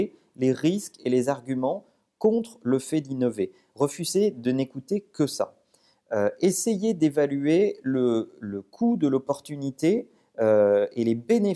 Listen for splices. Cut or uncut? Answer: uncut